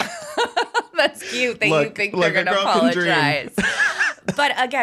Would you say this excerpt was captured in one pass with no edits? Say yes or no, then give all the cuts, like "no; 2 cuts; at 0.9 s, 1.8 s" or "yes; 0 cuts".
yes; 0 cuts